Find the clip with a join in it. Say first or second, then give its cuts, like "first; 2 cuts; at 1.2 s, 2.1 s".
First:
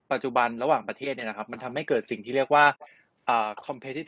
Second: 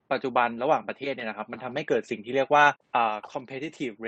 second; 1 cut; at 2.8 s